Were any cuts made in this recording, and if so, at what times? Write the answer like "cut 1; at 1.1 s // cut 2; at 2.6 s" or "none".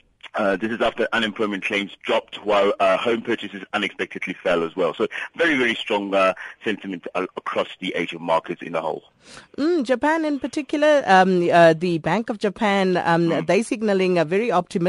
none